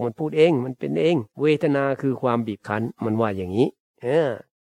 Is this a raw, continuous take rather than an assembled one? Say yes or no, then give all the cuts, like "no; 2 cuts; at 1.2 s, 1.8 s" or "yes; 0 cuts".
no; 1 cut; at 1.3 s